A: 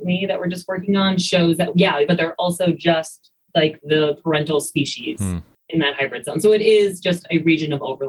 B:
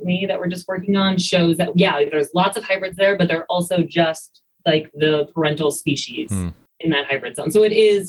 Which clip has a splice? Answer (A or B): A